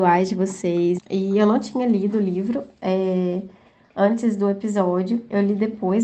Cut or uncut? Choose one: cut